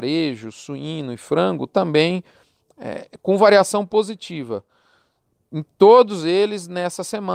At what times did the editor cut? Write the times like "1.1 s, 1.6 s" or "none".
none

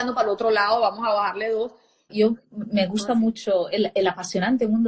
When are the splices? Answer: 2.1 s

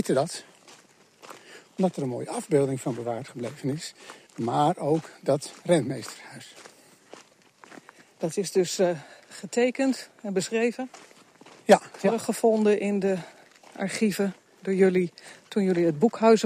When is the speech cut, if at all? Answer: 4.3 s

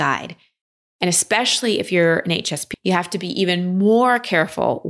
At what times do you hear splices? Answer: 2.7 s

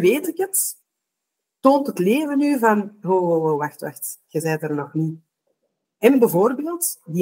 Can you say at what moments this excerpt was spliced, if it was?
5.8 s

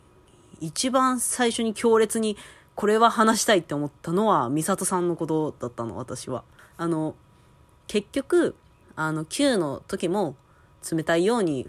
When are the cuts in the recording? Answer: 6.6 s

